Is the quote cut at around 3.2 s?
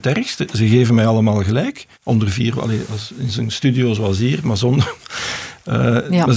no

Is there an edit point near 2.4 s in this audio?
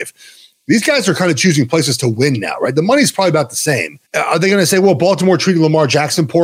no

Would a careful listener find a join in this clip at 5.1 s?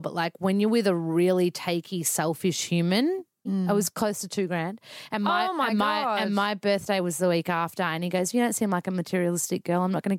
no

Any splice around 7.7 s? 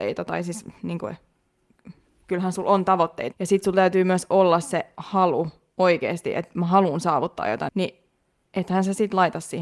yes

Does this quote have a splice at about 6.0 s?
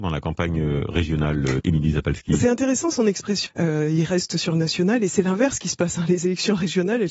no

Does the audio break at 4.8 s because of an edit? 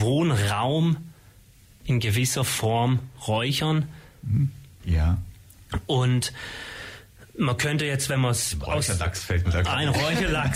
yes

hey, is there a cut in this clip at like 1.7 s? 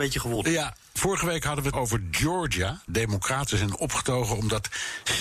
yes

